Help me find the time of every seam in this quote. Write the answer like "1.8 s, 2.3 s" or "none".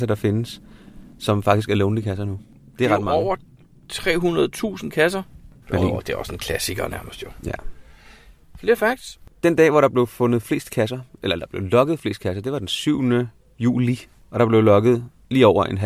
5.6 s